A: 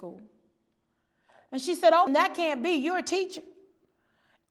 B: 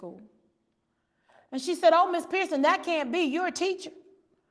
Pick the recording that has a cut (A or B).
A